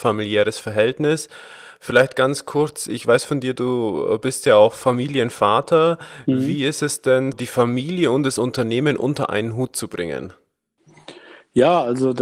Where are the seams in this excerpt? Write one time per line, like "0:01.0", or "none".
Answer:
0:07.3
0:08.4

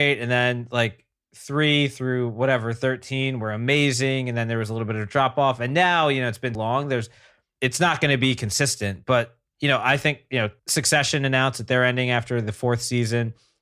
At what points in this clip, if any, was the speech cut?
0:06.6

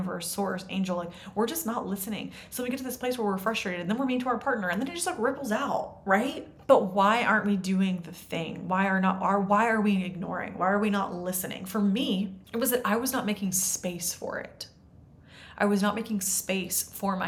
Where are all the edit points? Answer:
0:12.4

